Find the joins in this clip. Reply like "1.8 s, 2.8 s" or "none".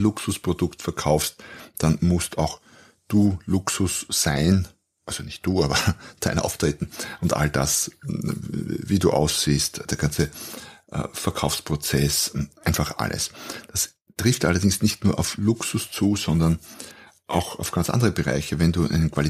none